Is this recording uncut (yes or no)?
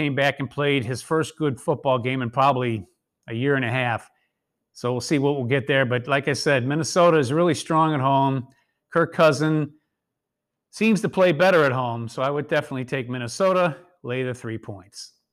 yes